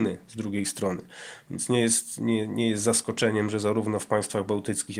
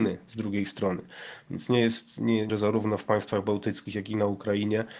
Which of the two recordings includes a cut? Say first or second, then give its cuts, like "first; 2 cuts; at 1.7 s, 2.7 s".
second; 1 cut; at 2.5 s